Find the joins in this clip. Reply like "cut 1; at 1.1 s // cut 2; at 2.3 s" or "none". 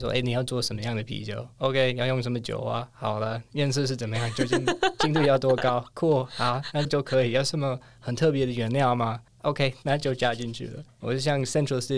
cut 1; at 6.8 s // cut 2; at 9.8 s